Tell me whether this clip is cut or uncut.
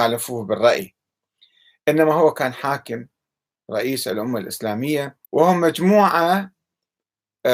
cut